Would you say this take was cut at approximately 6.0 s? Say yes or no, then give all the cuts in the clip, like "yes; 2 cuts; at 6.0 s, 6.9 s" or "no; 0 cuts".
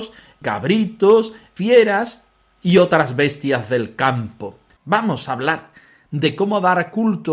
no; 1 cut; at 4.8 s